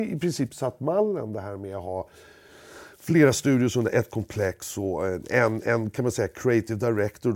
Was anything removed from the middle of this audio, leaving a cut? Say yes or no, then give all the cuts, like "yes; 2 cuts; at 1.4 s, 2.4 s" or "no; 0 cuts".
no; 0 cuts